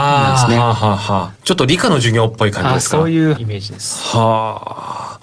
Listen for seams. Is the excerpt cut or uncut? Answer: cut